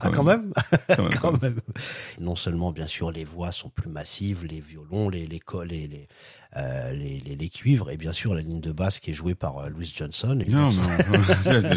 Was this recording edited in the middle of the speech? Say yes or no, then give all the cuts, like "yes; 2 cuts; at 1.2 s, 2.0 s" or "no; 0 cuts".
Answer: yes; 2 cuts; at 2.2 s, 10.4 s